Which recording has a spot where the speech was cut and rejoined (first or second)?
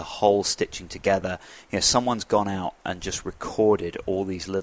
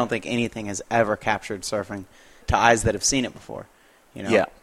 second